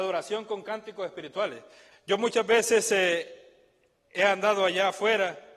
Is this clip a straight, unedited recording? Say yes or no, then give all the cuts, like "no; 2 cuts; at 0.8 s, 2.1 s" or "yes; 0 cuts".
no; 1 cut; at 1.9 s